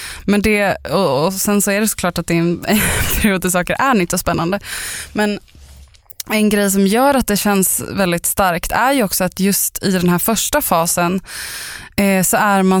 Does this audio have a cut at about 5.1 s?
no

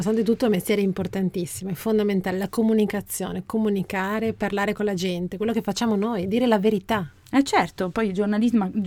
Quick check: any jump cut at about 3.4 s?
no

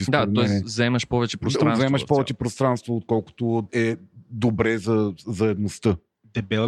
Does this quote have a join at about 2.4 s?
no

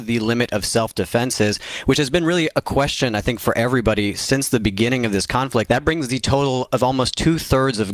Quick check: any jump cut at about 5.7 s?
yes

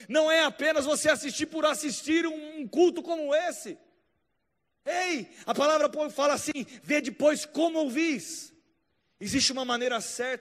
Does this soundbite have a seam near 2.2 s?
no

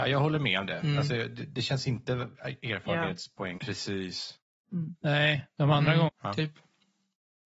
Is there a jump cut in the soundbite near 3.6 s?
yes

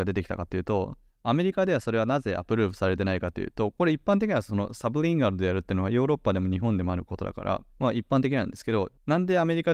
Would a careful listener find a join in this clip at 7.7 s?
yes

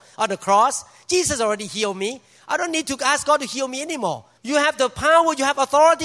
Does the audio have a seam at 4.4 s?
yes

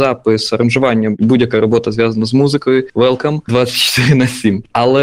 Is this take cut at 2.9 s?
no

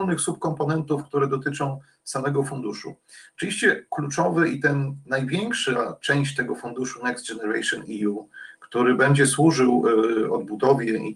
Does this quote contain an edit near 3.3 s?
no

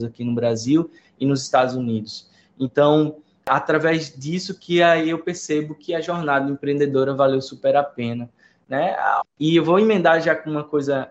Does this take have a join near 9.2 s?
yes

